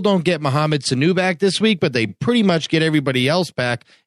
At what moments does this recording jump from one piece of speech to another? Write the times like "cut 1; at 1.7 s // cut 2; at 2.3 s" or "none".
none

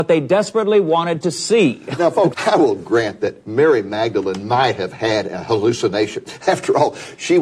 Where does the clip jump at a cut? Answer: cut 1; at 2.3 s

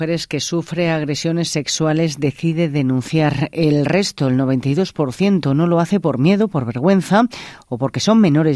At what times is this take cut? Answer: none

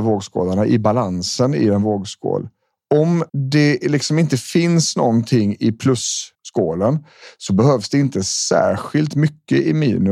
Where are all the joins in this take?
cut 1; at 3.3 s // cut 2; at 6.3 s

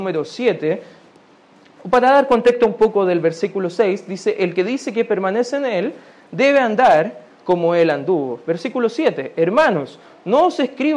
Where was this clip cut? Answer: none

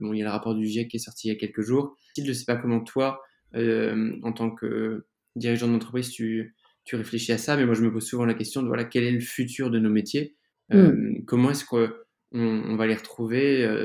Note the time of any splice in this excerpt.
cut 1; at 2.2 s

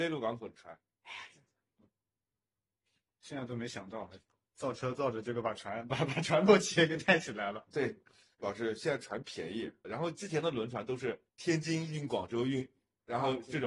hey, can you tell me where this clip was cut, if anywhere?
cut 1; at 9.8 s // cut 2; at 11.3 s

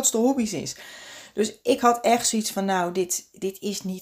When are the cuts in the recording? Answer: none

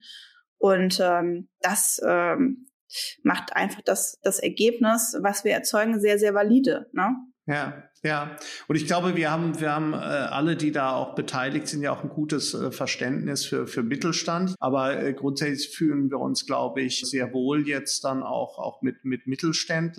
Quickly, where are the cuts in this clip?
cut 1; at 14.5 s // cut 2; at 17.0 s

